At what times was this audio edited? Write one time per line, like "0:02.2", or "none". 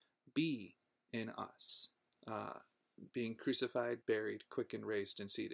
0:02.2
0:04.0